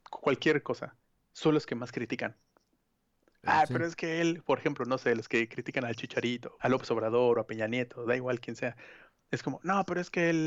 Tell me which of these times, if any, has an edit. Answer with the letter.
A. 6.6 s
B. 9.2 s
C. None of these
A